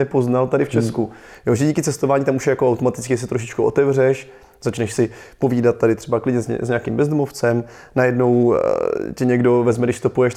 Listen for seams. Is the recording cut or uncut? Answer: uncut